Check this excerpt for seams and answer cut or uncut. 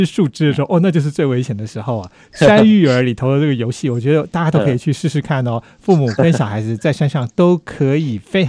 uncut